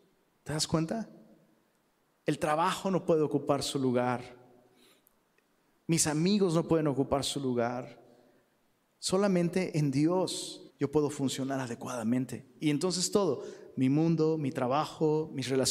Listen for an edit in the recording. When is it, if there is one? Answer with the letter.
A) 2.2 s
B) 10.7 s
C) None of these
B